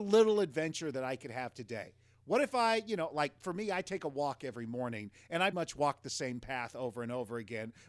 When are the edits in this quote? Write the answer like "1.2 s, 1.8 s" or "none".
5.5 s

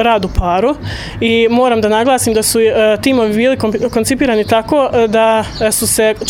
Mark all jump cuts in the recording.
none

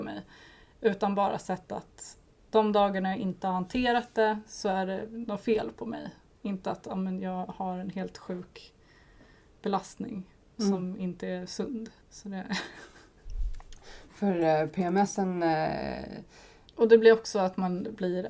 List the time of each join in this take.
12.0 s, 16.7 s

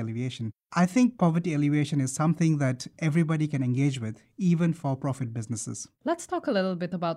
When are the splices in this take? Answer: 6.0 s

